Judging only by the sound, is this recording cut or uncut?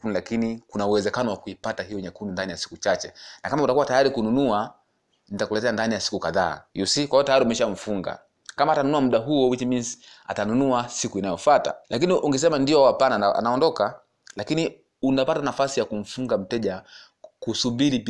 cut